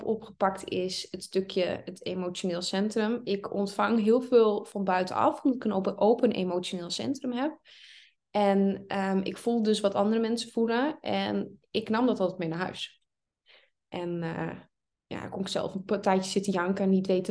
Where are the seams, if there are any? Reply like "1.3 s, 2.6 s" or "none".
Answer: none

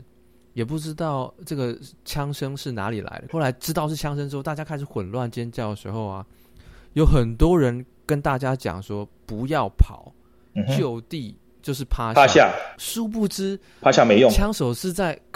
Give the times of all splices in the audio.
3.3 s

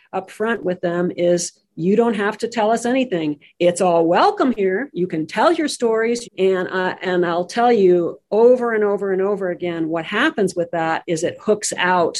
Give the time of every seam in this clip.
6.2 s

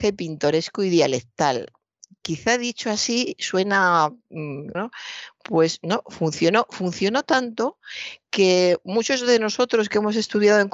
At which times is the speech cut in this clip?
4.7 s

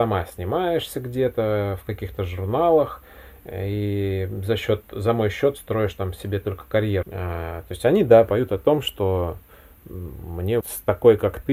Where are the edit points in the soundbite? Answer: 7.0 s, 10.6 s

